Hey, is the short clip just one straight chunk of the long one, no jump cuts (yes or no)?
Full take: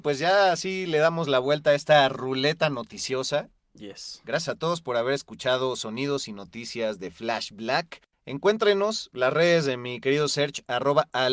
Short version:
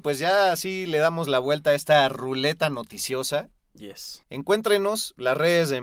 no